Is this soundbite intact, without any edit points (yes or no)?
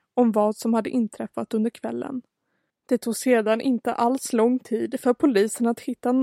no